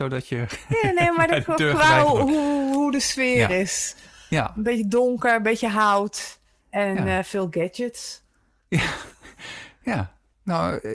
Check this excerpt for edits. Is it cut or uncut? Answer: uncut